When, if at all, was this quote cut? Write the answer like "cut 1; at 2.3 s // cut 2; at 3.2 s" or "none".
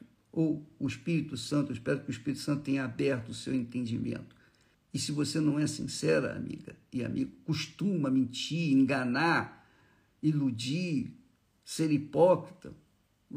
cut 1; at 4.7 s